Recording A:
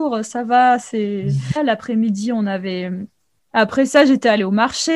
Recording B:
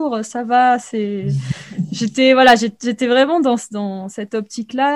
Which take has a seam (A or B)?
A